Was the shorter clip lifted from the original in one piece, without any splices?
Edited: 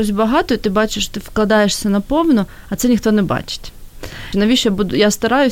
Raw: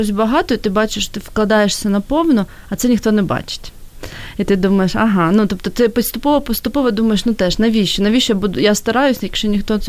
no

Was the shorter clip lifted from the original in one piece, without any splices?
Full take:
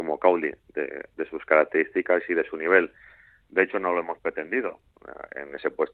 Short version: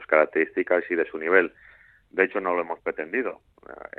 yes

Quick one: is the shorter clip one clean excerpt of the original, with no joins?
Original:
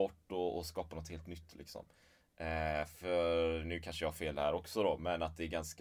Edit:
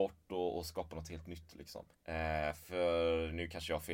no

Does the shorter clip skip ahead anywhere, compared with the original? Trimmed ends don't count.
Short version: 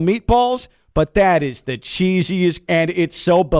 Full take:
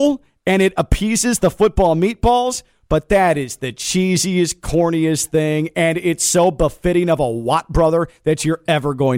yes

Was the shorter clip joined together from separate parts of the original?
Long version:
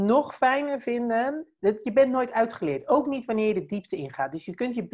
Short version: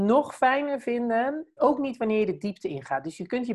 yes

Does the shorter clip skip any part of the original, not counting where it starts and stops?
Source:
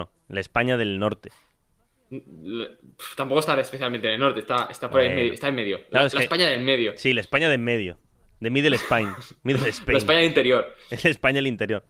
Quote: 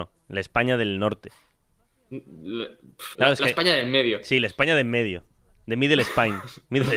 yes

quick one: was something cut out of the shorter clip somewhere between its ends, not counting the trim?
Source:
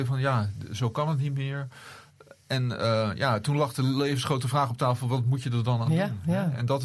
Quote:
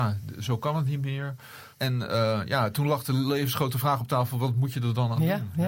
yes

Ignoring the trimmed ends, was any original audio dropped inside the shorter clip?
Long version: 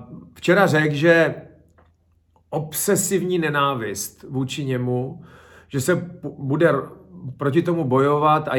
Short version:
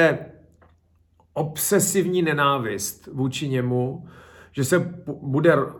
no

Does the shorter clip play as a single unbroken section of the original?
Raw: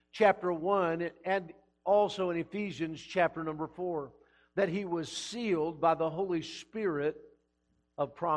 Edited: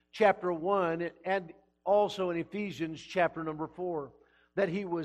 yes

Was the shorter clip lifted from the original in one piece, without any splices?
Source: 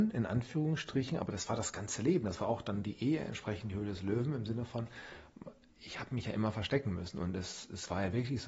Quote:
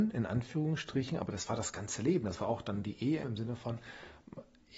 no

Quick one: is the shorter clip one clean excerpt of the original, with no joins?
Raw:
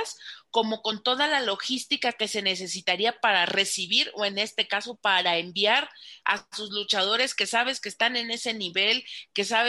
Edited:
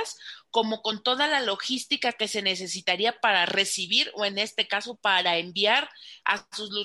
yes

